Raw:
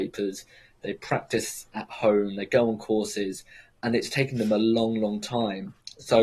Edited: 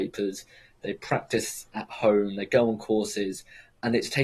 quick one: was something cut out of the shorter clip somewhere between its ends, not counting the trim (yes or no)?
no